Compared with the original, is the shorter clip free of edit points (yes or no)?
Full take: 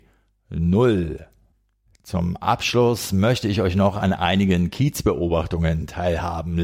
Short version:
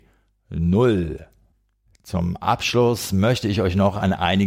yes